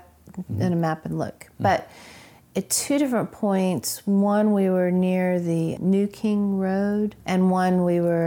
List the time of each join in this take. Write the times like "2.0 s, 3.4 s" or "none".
none